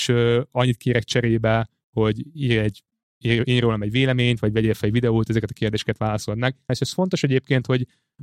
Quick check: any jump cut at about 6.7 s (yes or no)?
yes